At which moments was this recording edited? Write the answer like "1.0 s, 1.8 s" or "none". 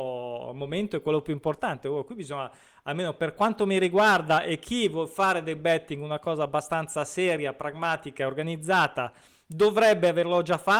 none